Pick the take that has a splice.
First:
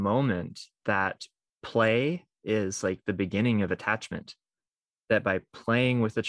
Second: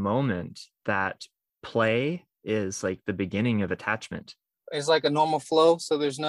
second; 1 cut; at 4.6 s

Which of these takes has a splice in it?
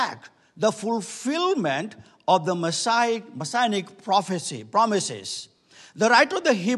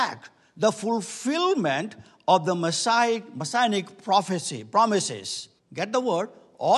second; 1 cut; at 5.6 s

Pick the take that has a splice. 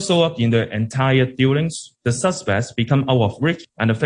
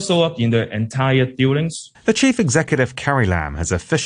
second; 1 cut; at 1.9 s

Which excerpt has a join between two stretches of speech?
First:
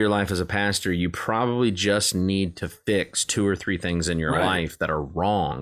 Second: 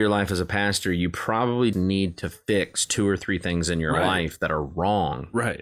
second; 1 cut; at 1.7 s

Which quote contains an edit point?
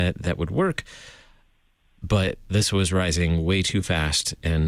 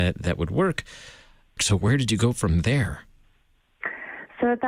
second; 1 cut; at 1.6 s

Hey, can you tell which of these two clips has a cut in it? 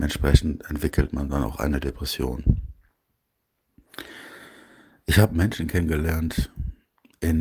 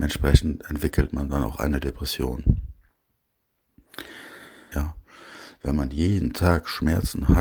second; 1 cut; at 4.7 s

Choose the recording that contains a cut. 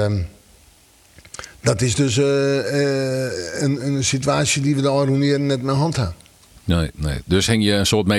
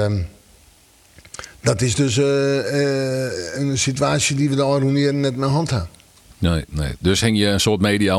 second; 1 cut; at 3.5 s

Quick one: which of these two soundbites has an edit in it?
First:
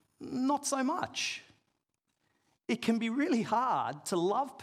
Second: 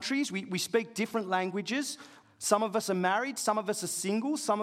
second; 1 cut; at 2.2 s

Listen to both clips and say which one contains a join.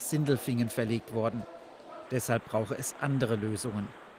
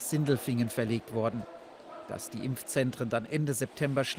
first; 1 cut; at 2.1 s

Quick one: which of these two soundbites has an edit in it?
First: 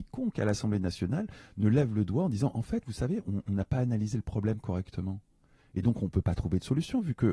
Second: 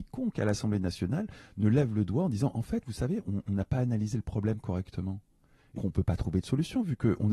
second; 1 cut; at 5.8 s

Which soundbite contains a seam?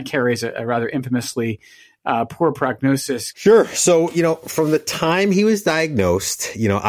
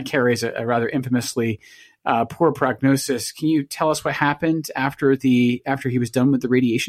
first; 1 cut; at 3.3 s

